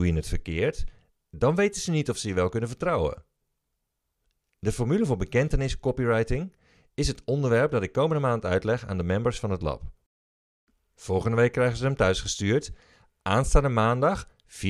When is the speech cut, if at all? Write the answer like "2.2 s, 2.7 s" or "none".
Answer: none